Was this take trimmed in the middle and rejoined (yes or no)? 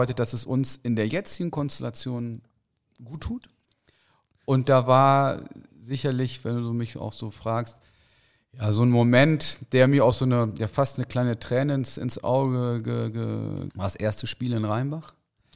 yes